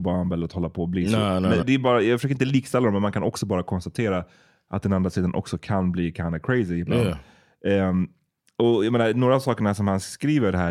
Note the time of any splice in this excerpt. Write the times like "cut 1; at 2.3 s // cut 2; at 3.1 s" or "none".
cut 1; at 1.6 s